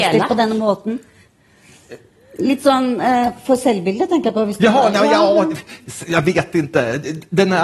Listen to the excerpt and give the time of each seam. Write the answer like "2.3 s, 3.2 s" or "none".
none